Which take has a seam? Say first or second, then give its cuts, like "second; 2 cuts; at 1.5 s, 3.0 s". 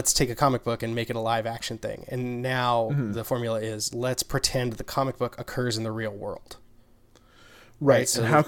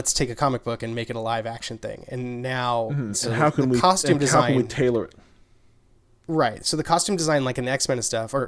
second; 1 cut; at 3.1 s